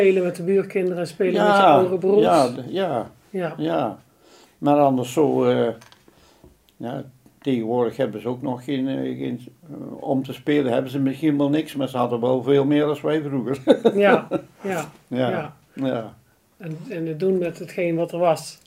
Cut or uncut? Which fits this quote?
uncut